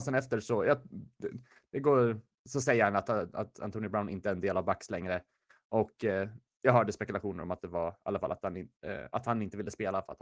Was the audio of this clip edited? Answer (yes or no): no